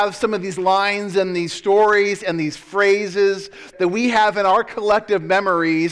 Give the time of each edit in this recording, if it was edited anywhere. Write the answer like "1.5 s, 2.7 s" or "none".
3.7 s